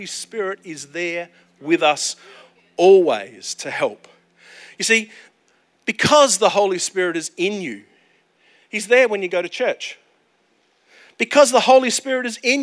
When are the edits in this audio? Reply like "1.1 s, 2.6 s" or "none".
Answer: none